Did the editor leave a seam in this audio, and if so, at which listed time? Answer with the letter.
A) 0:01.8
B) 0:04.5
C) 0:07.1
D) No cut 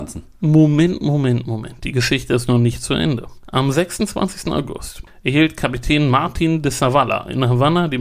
D